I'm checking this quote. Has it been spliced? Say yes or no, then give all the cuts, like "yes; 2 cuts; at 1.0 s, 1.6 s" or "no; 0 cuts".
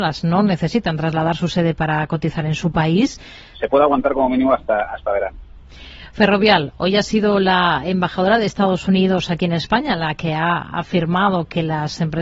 yes; 1 cut; at 3.5 s